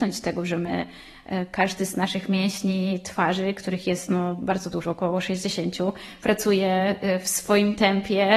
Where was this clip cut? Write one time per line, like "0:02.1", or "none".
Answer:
none